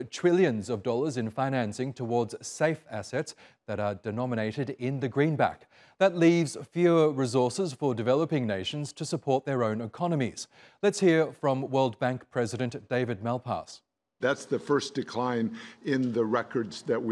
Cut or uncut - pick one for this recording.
cut